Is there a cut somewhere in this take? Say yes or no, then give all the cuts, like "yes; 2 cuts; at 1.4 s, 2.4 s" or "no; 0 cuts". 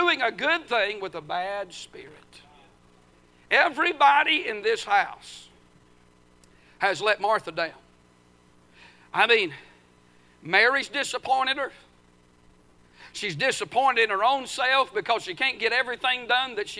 no; 0 cuts